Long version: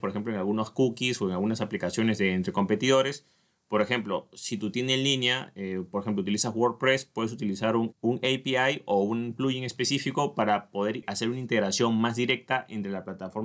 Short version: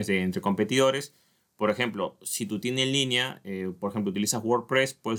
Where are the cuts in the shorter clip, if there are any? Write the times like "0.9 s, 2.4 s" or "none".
none